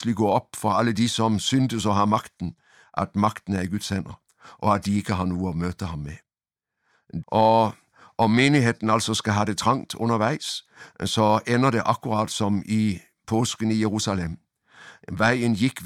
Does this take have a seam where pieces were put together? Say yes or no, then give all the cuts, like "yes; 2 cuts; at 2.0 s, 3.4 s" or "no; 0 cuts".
yes; 1 cut; at 7.2 s